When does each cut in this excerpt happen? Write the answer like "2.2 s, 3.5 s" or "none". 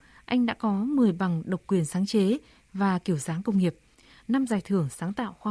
none